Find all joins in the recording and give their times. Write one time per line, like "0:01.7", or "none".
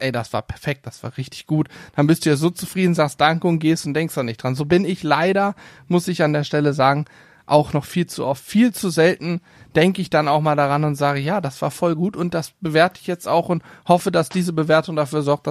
none